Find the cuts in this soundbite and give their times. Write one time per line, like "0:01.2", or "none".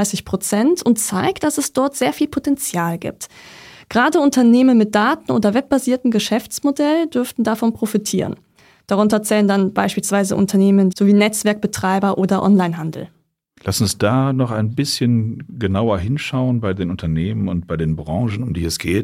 0:10.9